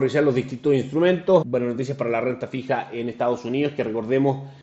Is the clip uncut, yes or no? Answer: no